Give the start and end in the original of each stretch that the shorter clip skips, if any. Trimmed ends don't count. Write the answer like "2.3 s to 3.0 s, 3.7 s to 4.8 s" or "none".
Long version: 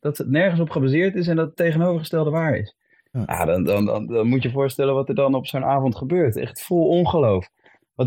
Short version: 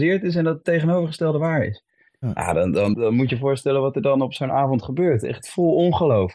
3.9 s to 4.1 s